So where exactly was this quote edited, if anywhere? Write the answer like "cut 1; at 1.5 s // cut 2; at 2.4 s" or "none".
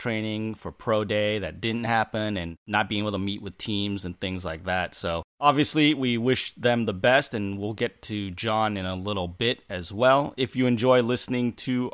none